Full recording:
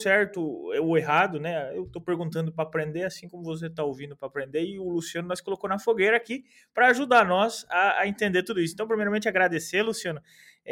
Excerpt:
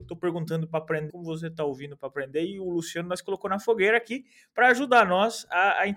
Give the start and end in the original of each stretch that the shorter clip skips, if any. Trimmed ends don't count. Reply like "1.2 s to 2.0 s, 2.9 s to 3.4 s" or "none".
2.9 s to 3.3 s